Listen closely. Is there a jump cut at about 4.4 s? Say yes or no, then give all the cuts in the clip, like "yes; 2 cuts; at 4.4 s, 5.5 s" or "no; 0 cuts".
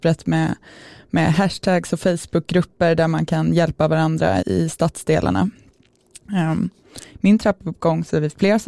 yes; 2 cuts; at 4.4 s, 7.1 s